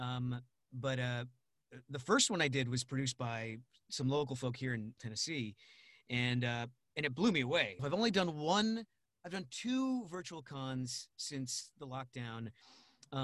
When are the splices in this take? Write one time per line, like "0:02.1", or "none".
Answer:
0:05.0
0:07.8